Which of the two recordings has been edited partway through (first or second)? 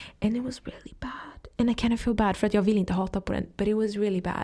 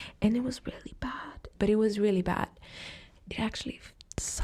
second